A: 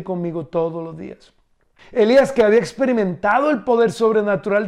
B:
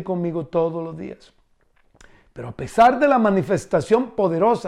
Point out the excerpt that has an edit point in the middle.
A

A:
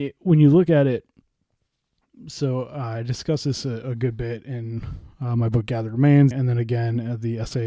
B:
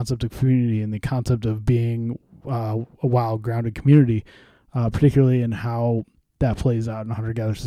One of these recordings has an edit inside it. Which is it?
A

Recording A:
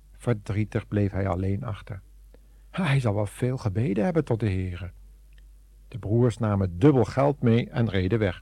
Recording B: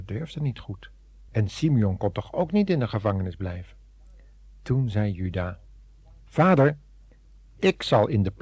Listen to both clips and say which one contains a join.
B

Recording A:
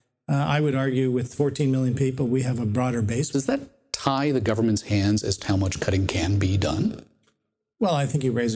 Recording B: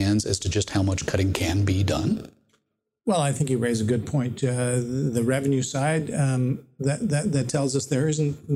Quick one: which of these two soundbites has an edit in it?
A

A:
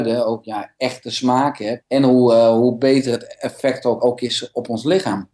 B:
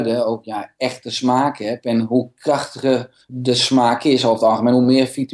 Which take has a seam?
A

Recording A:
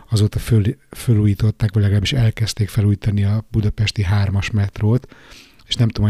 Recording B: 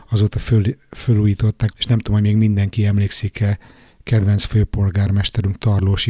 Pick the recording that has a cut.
B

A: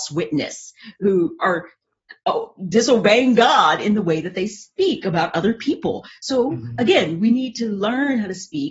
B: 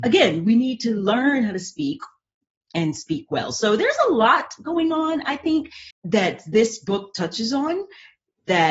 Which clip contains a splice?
B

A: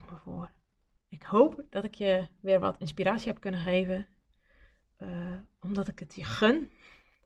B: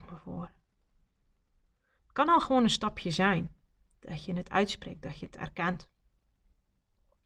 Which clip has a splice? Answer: A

